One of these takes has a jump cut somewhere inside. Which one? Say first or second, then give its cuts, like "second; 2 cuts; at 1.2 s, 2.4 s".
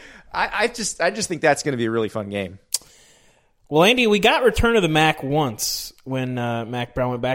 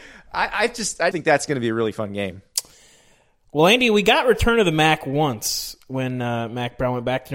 second; 1 cut; at 1.1 s